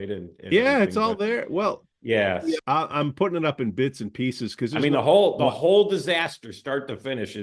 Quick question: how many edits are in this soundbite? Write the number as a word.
one